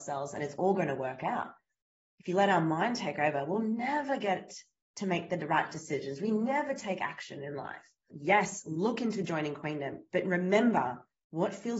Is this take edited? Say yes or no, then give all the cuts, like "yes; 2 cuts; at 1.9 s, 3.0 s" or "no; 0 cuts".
yes; 1 cut; at 8.1 s